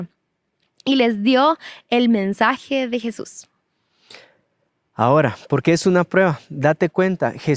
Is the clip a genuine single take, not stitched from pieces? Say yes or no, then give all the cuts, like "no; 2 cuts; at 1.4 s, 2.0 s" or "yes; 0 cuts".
yes; 0 cuts